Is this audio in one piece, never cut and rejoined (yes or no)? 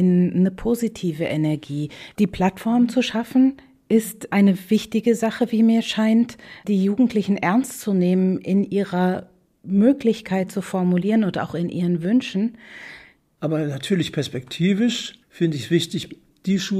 no